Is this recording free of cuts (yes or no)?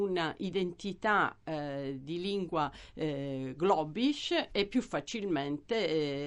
yes